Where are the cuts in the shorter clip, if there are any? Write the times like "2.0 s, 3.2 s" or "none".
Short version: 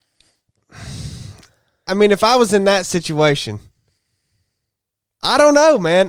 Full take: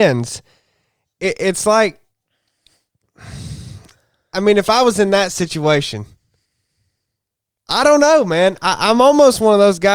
none